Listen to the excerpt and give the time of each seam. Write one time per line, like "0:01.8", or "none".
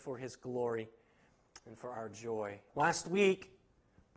0:02.7